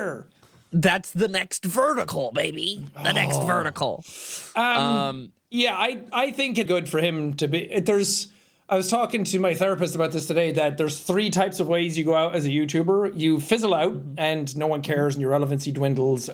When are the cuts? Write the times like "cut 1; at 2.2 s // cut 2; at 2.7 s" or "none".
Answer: cut 1; at 6.7 s